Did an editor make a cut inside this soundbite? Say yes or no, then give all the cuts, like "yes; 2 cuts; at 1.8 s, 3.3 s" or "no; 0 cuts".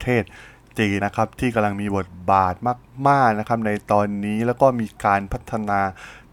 yes; 1 cut; at 1.0 s